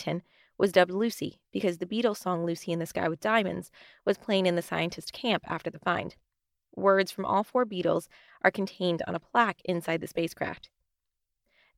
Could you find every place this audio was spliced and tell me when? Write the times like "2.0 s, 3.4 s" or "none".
none